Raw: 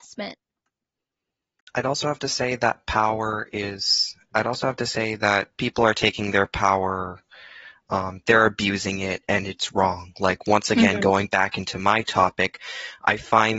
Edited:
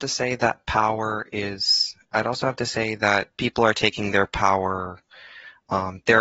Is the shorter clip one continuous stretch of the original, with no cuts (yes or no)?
yes